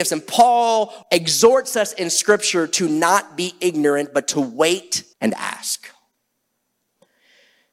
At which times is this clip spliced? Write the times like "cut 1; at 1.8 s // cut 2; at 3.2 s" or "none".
cut 1; at 1.0 s // cut 2; at 5.1 s